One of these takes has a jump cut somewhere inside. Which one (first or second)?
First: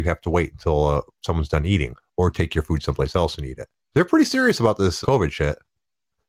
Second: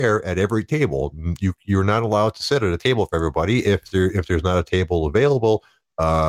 first